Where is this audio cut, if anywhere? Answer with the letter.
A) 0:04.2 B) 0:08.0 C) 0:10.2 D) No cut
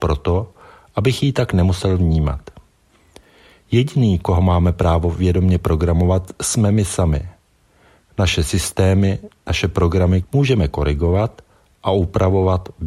C